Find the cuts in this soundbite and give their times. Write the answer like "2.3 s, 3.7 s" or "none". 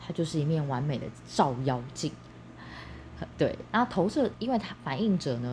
4.3 s